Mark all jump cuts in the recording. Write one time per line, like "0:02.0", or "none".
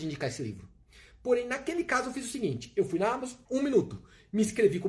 0:03.4